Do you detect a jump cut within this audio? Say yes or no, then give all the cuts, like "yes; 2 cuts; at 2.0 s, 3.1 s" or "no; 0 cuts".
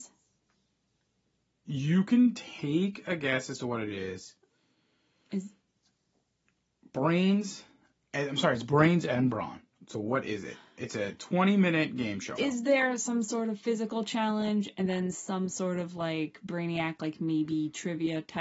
yes; 1 cut; at 12.4 s